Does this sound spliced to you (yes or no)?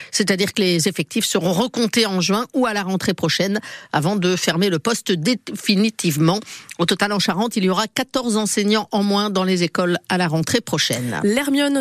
no